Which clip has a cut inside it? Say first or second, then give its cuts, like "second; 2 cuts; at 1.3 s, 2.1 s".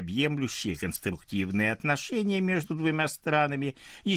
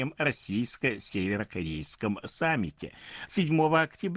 second; 1 cut; at 3.3 s